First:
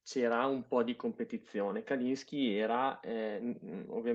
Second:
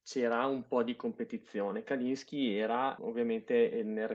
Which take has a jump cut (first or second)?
second